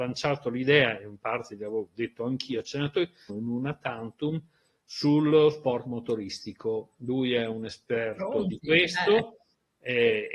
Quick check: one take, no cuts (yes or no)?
no